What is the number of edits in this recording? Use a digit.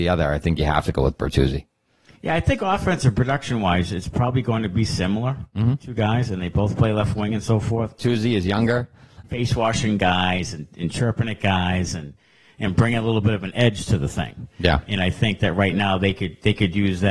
2